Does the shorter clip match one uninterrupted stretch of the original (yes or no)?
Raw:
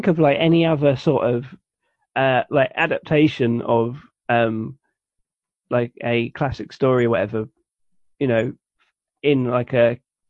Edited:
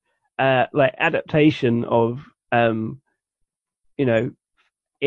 no